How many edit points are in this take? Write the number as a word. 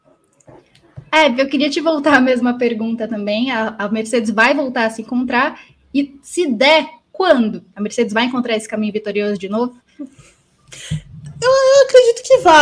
one